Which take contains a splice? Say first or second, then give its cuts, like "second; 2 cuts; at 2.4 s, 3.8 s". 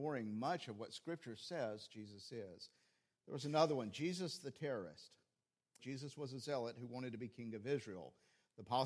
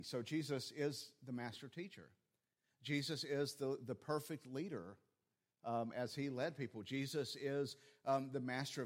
first; 1 cut; at 5.8 s